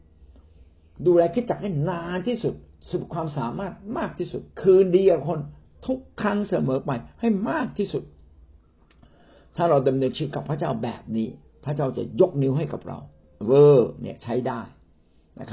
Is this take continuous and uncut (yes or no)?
no